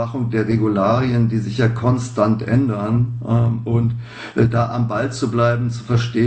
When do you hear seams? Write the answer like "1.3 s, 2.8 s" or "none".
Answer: none